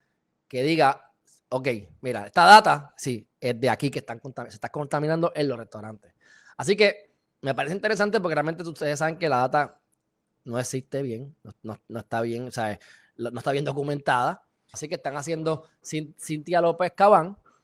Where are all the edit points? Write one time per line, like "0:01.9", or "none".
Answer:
0:14.7